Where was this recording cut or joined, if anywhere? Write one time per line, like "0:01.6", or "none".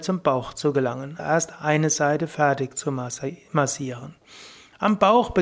0:01.2